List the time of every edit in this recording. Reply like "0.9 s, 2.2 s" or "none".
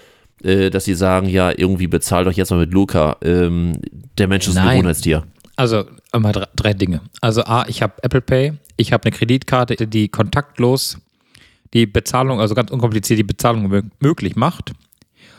3.9 s, 9.8 s